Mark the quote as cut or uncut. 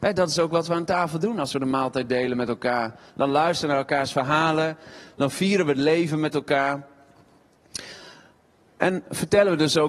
uncut